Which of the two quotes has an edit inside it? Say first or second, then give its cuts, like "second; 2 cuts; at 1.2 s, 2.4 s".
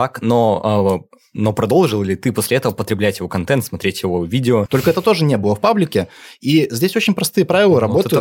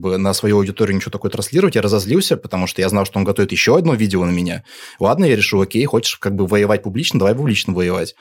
first; 1 cut; at 4.7 s